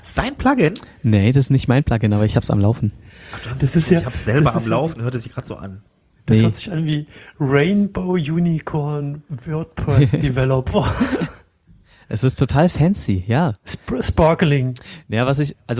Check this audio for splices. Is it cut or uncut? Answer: uncut